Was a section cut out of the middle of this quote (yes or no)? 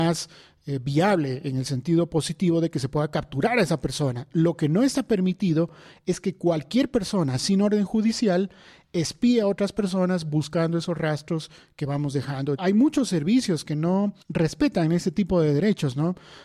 yes